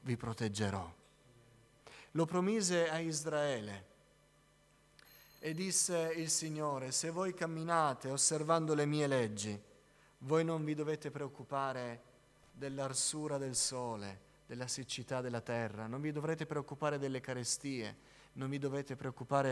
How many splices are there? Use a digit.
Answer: 0